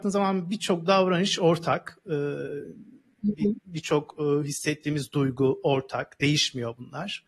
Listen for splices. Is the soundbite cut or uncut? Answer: uncut